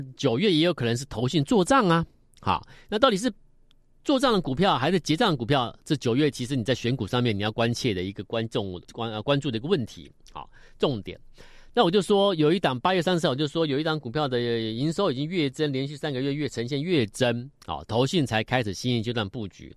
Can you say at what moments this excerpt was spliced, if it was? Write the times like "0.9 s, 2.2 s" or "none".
8.8 s, 17.5 s